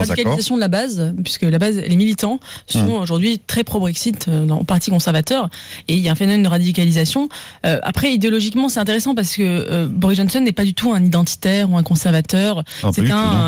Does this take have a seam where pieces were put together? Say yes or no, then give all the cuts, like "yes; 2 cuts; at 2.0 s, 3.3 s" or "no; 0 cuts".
no; 0 cuts